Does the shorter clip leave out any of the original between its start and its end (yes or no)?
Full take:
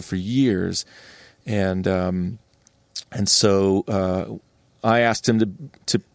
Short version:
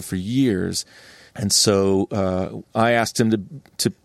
yes